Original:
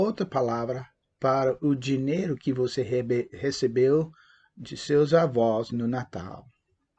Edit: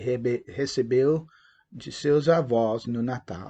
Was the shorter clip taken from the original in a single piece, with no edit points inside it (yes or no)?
yes